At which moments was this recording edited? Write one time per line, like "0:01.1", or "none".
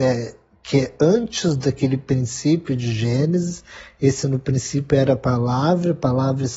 none